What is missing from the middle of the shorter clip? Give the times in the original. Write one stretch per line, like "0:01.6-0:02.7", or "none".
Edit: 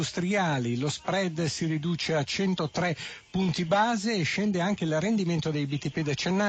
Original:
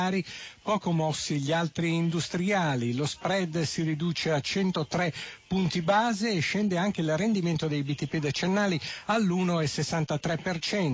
none

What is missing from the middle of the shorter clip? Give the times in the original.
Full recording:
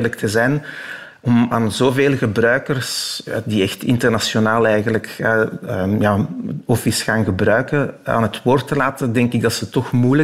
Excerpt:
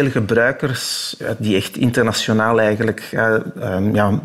none

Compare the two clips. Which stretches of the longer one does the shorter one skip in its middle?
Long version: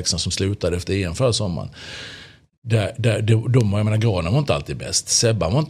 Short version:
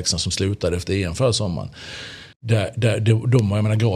0:02.3-0:02.5

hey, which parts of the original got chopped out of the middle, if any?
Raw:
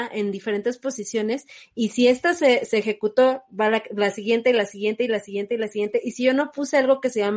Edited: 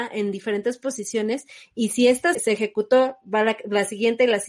0:02.3-0:02.6

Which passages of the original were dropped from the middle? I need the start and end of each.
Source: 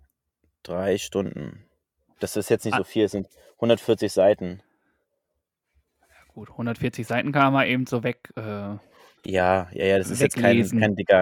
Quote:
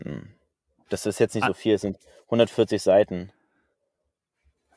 none

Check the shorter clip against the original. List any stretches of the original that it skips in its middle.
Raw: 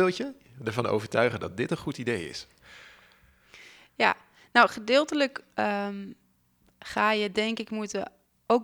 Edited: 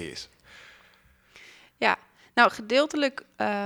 none

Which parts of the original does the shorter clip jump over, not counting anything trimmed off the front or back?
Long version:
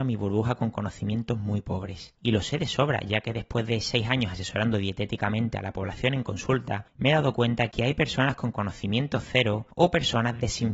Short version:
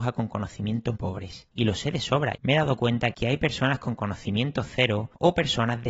0:01.4-0:01.6
0:03.0-0:06.9

